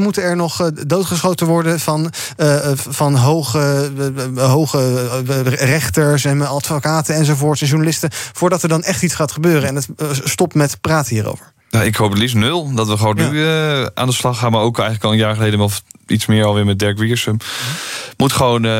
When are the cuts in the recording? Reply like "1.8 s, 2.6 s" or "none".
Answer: 11.6 s